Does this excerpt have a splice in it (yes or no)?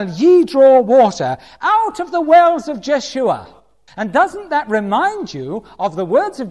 yes